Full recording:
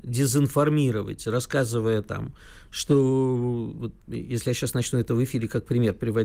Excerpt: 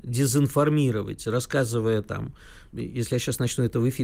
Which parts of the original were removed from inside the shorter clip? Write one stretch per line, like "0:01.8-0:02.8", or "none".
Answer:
0:02.7-0:04.0